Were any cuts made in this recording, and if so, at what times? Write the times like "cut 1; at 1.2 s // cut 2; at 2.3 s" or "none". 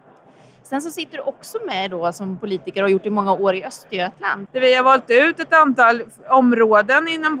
cut 1; at 4.5 s